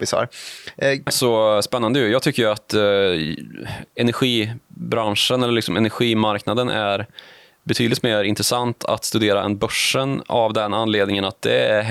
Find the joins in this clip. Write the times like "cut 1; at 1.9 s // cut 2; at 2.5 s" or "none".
cut 1; at 1.1 s